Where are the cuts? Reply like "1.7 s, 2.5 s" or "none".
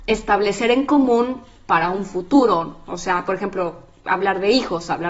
none